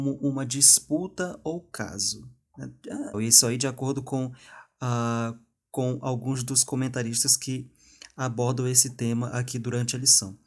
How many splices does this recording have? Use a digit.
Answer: 1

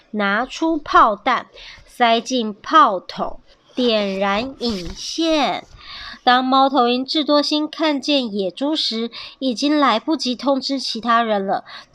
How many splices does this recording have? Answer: 1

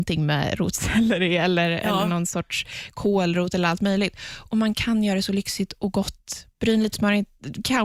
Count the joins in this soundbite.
1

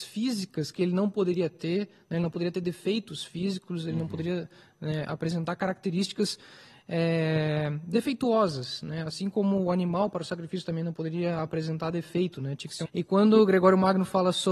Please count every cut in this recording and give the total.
1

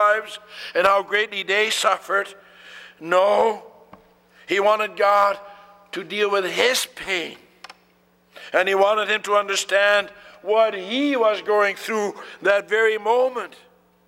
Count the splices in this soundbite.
0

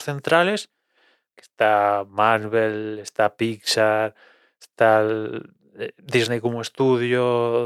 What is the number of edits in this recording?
0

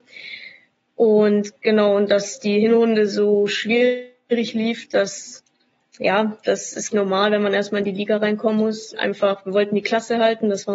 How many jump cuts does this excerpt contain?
2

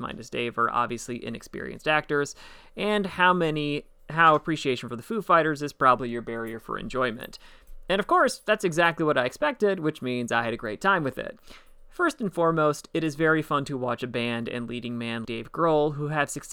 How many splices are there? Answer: 1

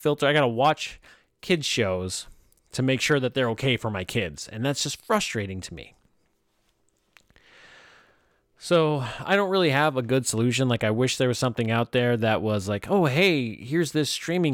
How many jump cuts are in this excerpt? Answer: 0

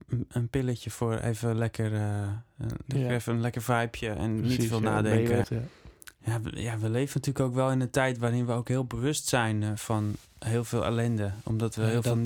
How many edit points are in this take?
1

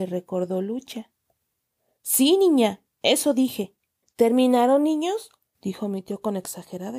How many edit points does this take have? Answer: 2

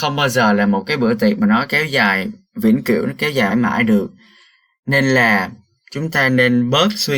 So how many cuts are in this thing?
1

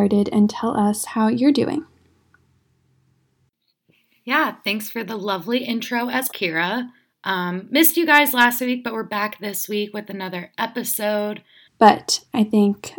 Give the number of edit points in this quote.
2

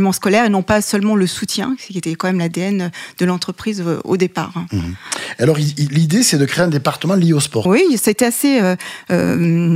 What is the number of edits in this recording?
1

